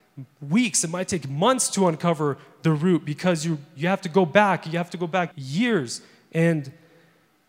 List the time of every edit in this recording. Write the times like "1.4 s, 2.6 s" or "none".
5.3 s